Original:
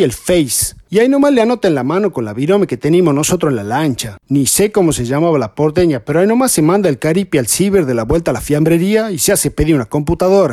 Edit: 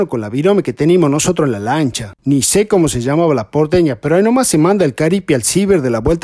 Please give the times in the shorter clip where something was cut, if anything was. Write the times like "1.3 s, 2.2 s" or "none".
none